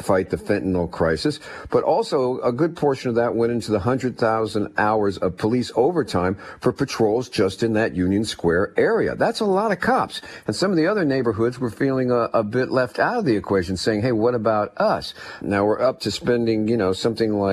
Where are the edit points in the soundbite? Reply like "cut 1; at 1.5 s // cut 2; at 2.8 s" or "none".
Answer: cut 1; at 15.4 s